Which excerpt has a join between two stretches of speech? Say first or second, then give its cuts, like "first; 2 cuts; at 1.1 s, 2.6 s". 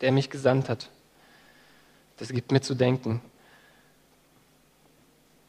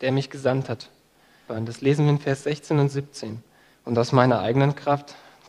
second; 2 cuts; at 1.5 s, 3.7 s